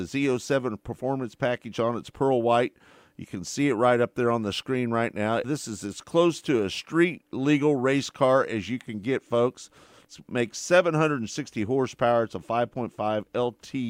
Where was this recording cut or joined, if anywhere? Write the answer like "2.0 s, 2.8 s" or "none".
5.4 s